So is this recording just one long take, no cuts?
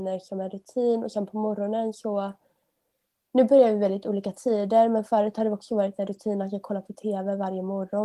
yes; 0 cuts

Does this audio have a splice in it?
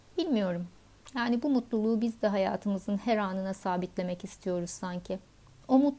no; 0 cuts

